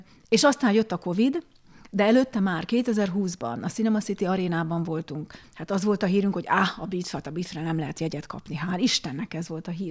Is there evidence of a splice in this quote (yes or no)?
yes